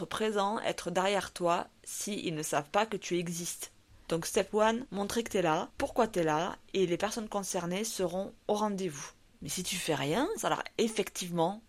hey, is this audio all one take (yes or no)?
no